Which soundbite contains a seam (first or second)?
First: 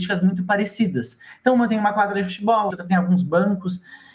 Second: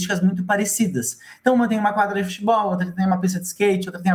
first